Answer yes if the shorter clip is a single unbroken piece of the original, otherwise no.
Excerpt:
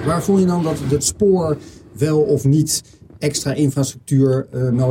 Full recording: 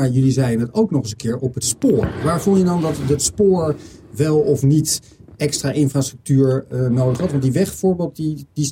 yes